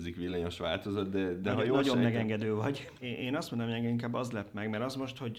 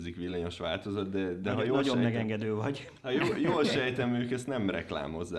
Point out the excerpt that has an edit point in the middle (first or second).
first